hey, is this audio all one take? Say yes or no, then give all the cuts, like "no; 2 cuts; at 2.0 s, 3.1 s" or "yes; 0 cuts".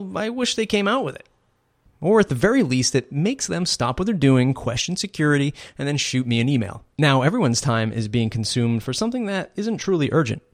no; 2 cuts; at 1.9 s, 6.9 s